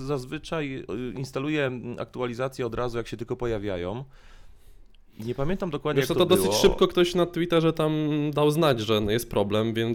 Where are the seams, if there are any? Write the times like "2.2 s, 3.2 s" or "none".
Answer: none

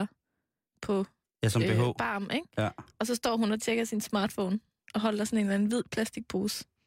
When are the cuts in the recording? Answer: none

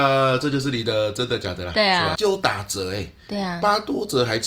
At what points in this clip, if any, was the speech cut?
2.1 s

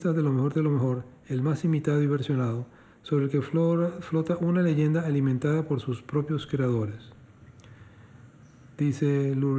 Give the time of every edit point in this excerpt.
none

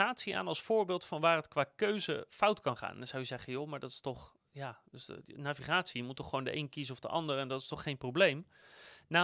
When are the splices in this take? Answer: none

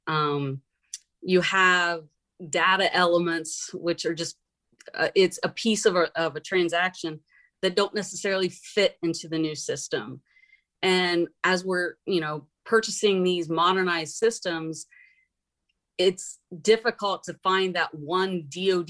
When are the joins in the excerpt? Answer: none

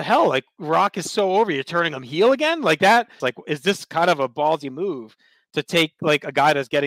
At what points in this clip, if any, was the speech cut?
3.2 s

